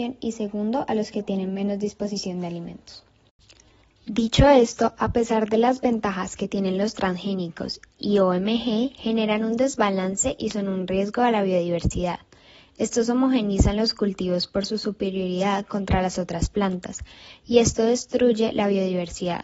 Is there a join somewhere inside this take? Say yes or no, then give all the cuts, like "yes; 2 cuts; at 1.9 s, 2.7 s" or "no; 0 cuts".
no; 0 cuts